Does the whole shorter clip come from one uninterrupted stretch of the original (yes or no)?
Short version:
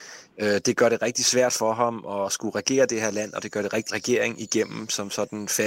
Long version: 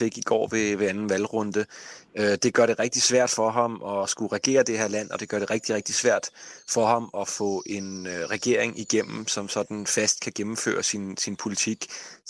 no